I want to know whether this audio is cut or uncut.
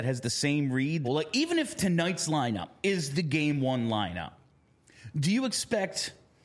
cut